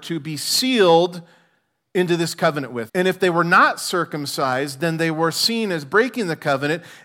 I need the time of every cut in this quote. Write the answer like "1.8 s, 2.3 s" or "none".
2.9 s

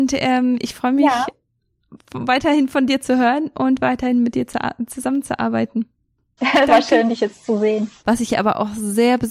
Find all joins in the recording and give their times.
6.4 s, 8.0 s

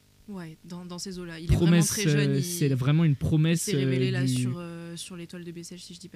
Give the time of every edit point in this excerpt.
none

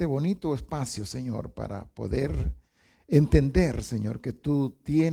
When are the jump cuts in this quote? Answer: none

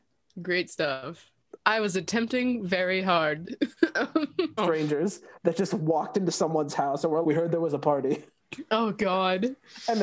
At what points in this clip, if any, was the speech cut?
1.6 s, 4.6 s, 7.2 s

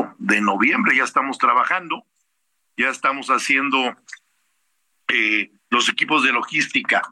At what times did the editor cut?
5.6 s

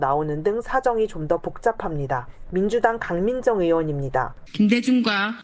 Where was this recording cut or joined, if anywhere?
none

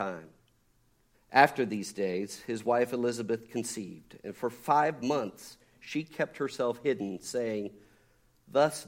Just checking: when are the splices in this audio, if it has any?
1.1 s

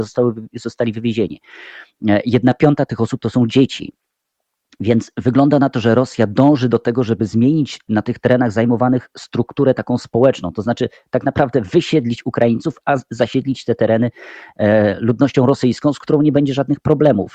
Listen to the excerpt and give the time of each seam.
none

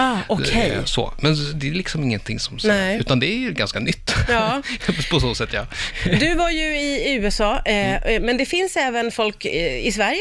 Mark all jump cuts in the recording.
none

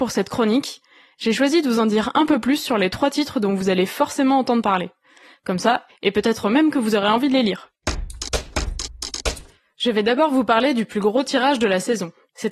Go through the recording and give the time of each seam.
5.9 s

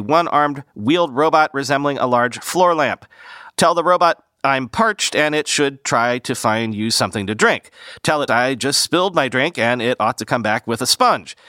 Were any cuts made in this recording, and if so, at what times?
3.5 s, 8.3 s

